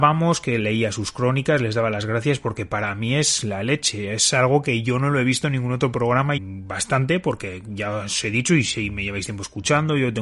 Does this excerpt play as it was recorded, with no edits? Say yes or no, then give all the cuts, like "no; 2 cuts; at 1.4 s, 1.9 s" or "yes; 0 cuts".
no; 1 cut; at 6.4 s